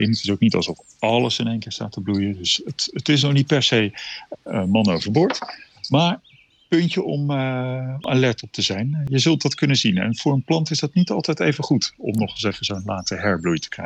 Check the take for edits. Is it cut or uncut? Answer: uncut